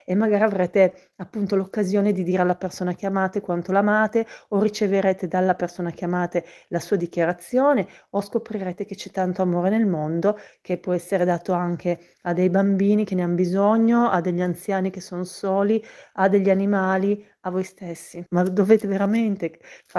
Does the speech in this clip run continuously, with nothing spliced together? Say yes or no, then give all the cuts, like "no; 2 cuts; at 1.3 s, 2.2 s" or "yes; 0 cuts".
no; 1 cut; at 18.3 s